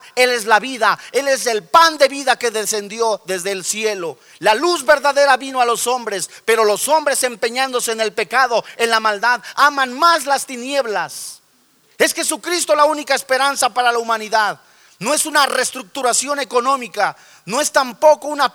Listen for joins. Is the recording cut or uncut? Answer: uncut